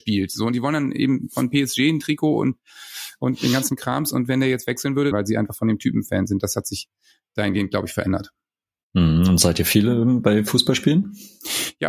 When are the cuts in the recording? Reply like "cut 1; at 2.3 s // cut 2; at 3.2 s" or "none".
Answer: cut 1; at 5.1 s